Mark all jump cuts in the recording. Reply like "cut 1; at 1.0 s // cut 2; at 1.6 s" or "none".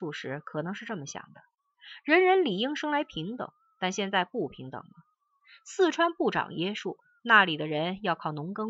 none